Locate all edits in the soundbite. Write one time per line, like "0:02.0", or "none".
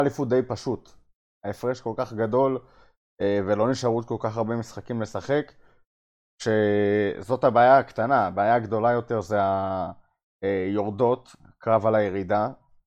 none

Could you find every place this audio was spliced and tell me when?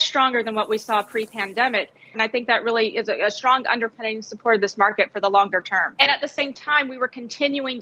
0:02.1
0:06.0

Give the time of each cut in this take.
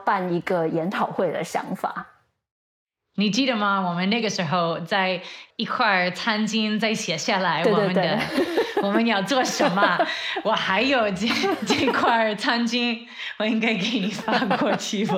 none

